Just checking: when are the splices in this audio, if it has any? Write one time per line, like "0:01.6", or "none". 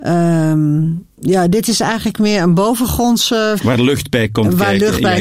0:01.1
0:03.6